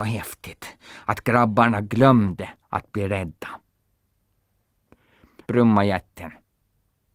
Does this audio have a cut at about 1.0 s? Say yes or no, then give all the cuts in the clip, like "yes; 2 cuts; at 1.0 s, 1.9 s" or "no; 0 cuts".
no; 1 cut; at 5.4 s